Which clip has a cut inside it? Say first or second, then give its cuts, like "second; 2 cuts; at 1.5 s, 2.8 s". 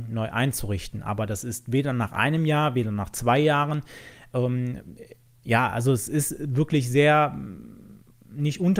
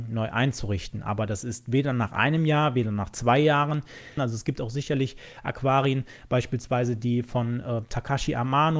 second; 1 cut; at 4.2 s